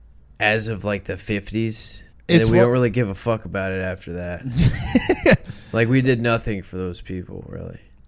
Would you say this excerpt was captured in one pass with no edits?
no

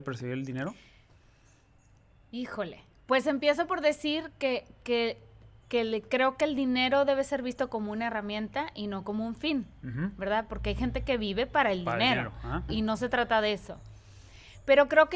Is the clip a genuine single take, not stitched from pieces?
no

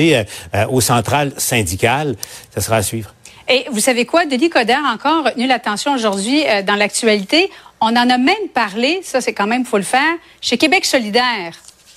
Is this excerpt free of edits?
yes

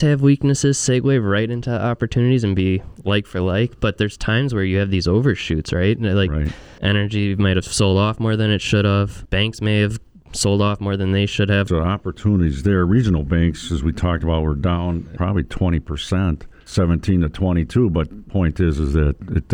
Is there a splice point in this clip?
yes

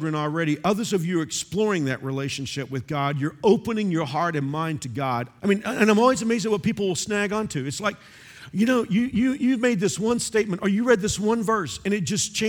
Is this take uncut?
no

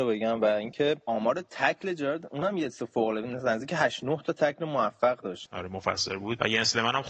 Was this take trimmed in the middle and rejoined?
yes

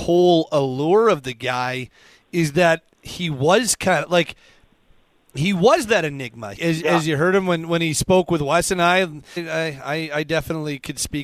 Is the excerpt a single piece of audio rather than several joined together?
no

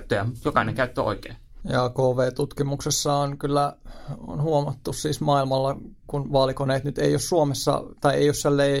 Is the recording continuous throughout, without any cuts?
no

